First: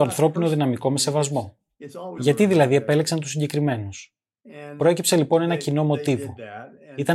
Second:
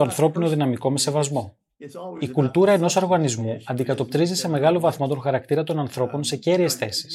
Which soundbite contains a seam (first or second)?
first